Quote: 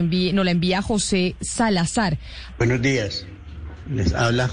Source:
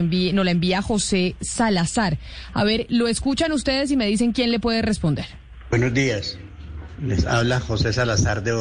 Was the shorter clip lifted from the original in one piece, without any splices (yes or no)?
no